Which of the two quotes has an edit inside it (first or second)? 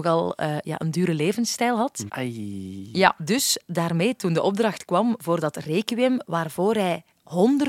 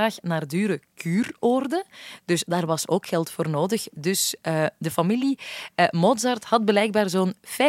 first